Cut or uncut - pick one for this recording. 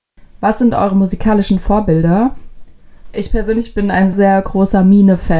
cut